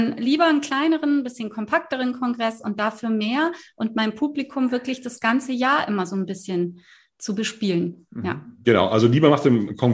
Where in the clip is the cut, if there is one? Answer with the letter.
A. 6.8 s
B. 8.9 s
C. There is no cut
C